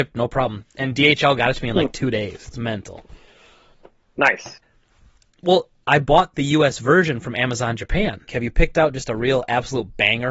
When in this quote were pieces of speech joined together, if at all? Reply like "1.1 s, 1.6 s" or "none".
4.6 s, 8.3 s